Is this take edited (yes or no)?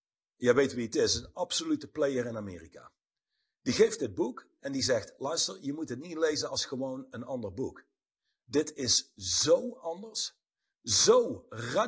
no